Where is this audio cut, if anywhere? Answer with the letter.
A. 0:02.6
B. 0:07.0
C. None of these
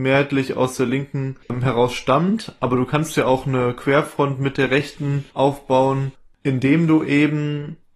C